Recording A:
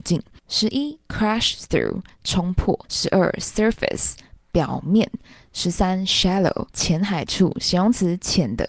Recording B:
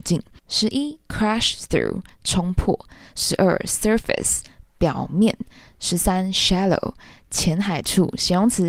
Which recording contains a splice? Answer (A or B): A